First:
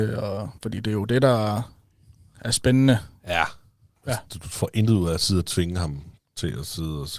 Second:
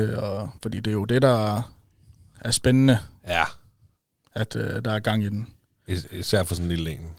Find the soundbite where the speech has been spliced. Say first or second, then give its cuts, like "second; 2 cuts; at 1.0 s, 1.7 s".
first; 1 cut; at 4.0 s